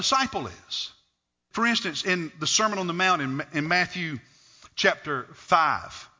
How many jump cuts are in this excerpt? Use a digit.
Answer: 1